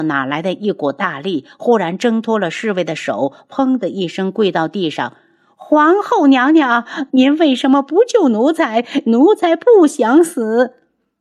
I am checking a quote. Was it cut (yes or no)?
yes